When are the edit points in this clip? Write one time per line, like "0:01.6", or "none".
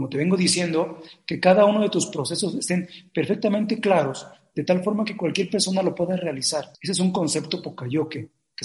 0:06.7